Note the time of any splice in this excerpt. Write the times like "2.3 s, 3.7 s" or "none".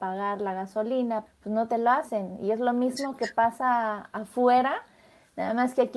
1.3 s